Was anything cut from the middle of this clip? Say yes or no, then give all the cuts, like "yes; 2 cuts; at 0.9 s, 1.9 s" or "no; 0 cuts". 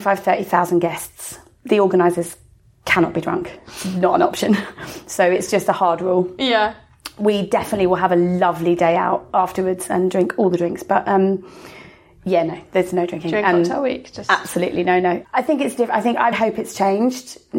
yes; 2 cuts; at 15.2 s, 16.3 s